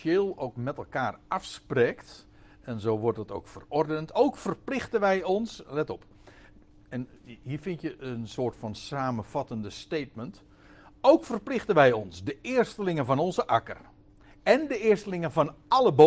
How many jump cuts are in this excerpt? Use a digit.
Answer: 0